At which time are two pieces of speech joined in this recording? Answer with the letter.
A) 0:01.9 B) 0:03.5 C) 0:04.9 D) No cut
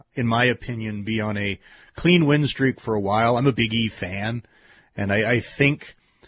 B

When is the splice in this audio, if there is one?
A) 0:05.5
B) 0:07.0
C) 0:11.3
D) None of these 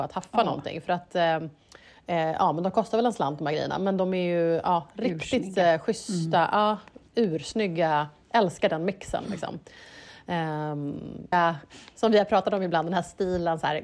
C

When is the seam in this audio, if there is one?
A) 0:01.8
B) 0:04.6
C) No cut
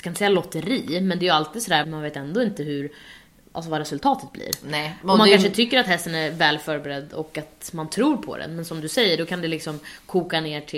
A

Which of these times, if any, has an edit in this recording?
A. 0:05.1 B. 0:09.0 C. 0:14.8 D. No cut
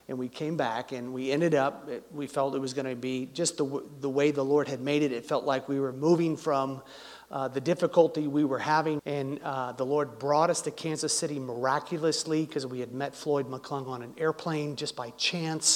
B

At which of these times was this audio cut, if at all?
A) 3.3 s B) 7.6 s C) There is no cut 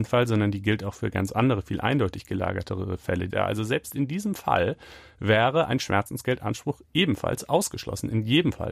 A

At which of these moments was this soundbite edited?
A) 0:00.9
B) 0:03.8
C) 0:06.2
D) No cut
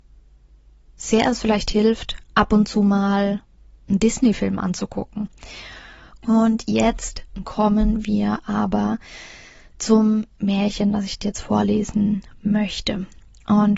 C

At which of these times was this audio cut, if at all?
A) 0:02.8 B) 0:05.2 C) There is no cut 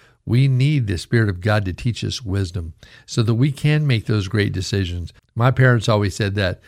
B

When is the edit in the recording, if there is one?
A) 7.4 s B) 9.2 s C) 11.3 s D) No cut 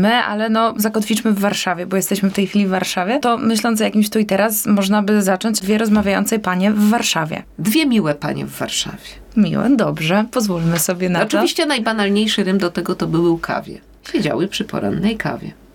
A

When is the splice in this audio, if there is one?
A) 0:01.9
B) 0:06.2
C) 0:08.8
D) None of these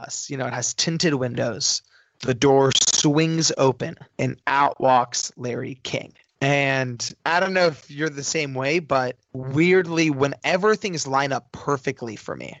D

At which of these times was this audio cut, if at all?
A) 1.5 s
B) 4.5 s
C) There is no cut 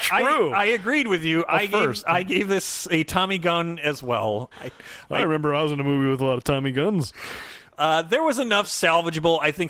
B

